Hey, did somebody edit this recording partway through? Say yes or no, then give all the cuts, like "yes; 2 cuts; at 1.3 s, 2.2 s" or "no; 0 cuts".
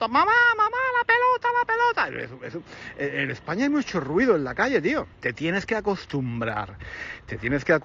yes; 1 cut; at 5.1 s